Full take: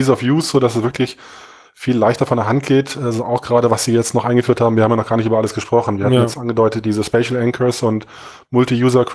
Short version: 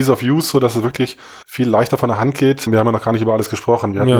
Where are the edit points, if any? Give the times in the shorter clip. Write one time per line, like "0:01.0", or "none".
0:01.4
0:02.7